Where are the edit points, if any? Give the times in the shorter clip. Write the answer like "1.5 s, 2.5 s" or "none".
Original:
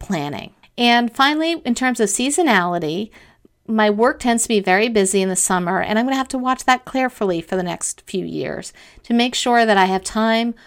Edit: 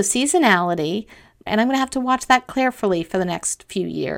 1.5 s